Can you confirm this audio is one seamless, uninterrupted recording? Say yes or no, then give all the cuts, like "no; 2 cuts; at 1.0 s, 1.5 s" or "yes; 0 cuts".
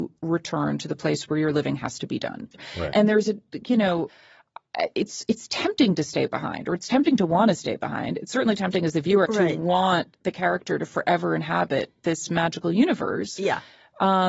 no; 1 cut; at 9.3 s